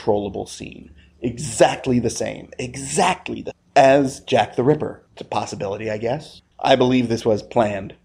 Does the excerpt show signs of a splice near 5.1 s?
yes; 2 cuts; at 5.1 s, 6.5 s

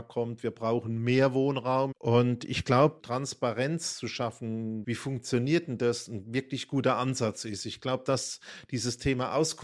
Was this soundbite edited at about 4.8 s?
yes; 3 cuts; at 1.9 s, 3.0 s, 4.8 s

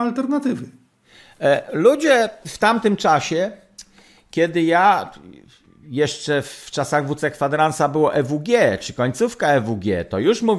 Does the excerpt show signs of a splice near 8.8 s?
no; 0 cuts

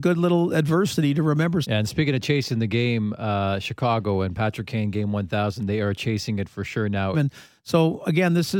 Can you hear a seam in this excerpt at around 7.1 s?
yes; 2 cuts; at 1.6 s, 7.1 s

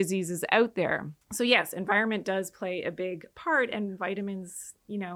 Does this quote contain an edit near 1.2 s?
yes; 1 cut; at 1.2 s

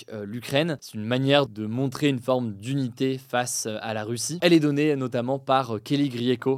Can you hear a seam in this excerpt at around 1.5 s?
yes; 2 cuts; at 1.5 s, 4.4 s

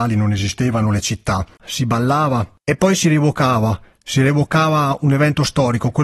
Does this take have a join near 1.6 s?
yes; 1 cut; at 1.6 s

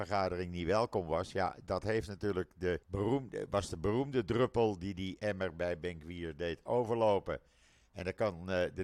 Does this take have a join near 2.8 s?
yes; 1 cut; at 2.8 s

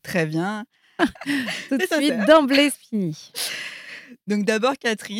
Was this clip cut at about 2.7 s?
yes; 2 cuts; at 1.0 s, 2.7 s

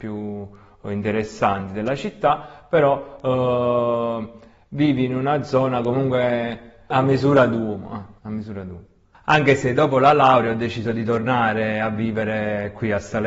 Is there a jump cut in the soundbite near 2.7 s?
no; 1 cut; at 8.2 s

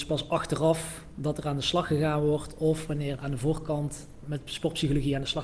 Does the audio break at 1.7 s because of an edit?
no; 1 cut; at 3.2 s

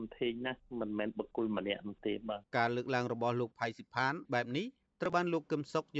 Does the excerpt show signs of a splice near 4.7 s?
no; 1 cut; at 2.5 s

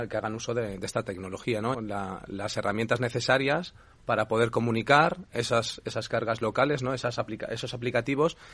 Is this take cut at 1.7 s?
yes; 1 cut; at 1.7 s

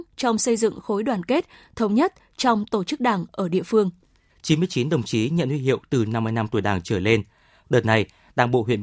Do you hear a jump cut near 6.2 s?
no; 2 cuts; at 4.3 s, 7.6 s

